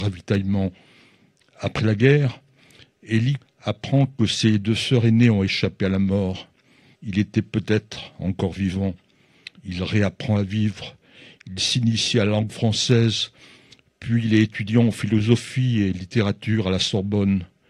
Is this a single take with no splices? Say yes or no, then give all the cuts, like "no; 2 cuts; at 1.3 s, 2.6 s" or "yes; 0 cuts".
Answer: no; 3 cuts; at 3.4 s, 6.9 s, 9.6 s